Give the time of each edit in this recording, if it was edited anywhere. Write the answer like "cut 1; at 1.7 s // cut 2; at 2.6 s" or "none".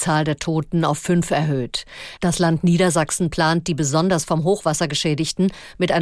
cut 1; at 2.2 s

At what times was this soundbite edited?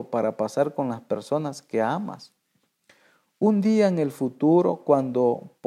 none

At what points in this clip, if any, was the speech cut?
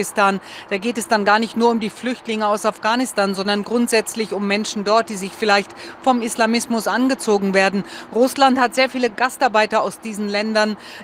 none

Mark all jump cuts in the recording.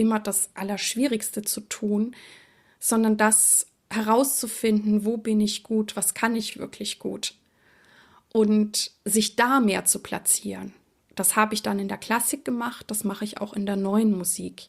none

